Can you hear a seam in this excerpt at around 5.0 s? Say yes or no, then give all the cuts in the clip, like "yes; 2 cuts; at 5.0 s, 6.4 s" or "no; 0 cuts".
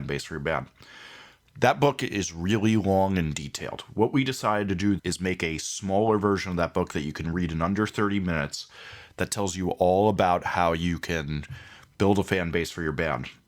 yes; 1 cut; at 5.0 s